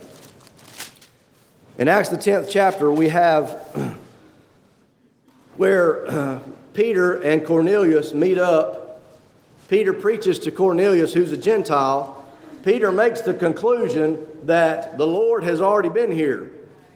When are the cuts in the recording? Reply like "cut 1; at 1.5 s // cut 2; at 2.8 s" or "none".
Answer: none